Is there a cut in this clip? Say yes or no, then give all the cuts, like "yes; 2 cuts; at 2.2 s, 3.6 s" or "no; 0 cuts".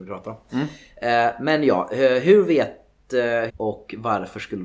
yes; 1 cut; at 3.5 s